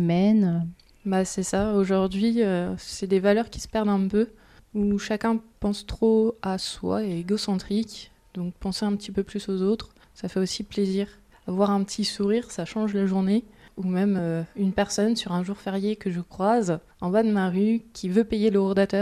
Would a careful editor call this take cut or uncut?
uncut